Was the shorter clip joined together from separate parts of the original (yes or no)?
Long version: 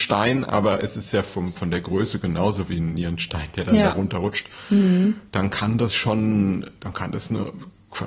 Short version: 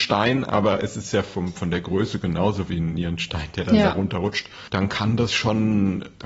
yes